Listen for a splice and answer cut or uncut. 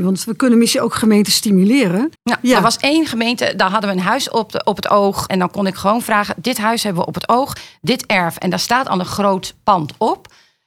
cut